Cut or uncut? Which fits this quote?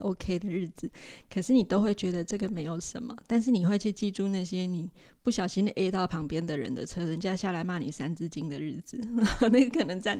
uncut